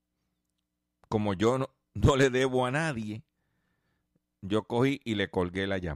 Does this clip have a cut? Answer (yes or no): no